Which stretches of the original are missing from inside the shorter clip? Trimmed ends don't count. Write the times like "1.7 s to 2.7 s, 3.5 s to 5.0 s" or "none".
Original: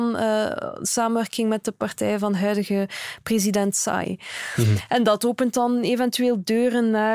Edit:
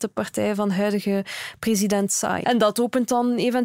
4.1 s to 4.9 s